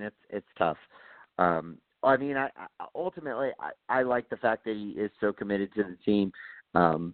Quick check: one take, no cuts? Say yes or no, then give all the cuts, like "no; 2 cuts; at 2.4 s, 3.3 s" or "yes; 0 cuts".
yes; 0 cuts